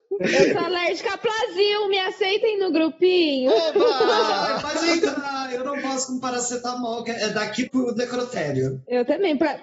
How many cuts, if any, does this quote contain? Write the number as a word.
one